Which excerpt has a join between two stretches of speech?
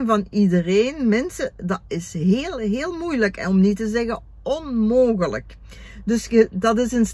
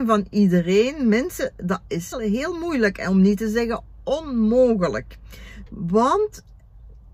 second; 2 cuts; at 2.1 s, 5.7 s

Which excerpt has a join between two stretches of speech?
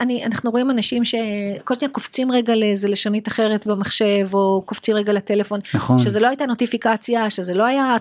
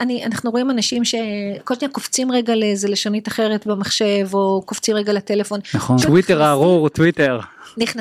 second; 1 cut; at 6.0 s

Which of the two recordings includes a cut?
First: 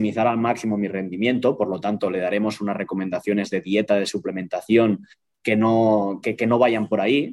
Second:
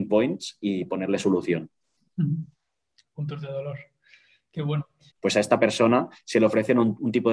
second; 1 cut; at 5.1 s

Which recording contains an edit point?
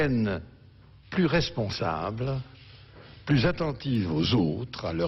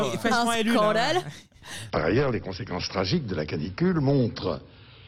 second; 1 cut; at 1.9 s

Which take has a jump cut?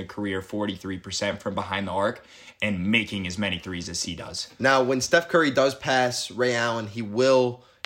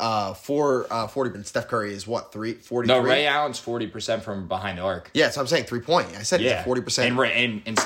second; 1 cut; at 1.3 s

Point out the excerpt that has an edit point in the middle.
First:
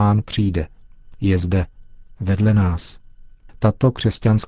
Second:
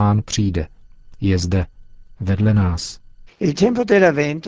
second; 1 cut; at 3.3 s

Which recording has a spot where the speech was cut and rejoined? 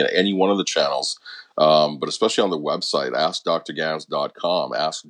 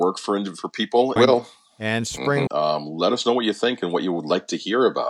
second; 2 cuts; at 1.2 s, 2.5 s

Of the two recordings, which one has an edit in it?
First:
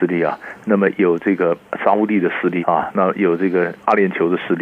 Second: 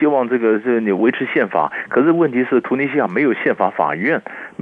first; 1 cut; at 2.6 s

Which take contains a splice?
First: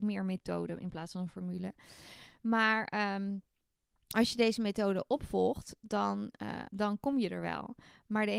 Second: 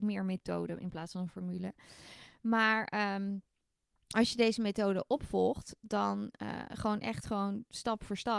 first; 1 cut; at 6.7 s

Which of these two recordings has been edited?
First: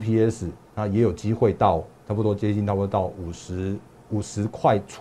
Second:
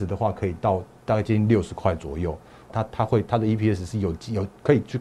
second; 1 cut; at 2.7 s

